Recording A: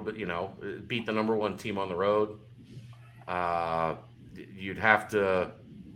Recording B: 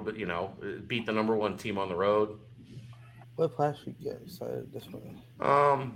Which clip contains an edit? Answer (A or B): B